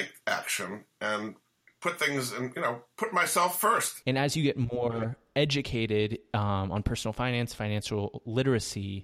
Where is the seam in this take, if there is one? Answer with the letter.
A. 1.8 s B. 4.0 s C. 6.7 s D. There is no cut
B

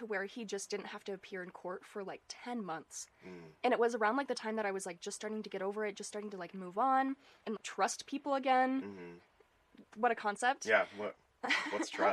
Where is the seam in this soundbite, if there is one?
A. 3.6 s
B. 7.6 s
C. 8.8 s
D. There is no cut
B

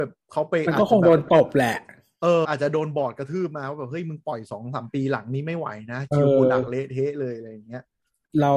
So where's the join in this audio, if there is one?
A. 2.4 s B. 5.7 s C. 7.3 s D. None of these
A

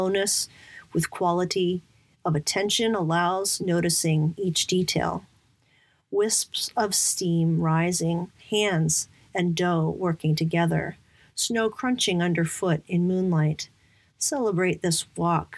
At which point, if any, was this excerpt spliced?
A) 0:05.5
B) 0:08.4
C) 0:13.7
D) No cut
B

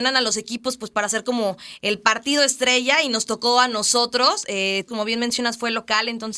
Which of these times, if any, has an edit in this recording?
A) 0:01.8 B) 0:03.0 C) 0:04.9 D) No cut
C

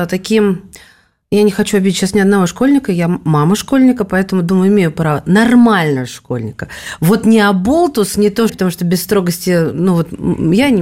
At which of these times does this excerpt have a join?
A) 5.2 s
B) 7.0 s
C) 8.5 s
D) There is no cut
C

